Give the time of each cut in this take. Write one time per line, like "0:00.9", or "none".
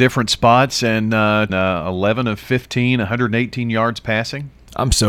0:01.5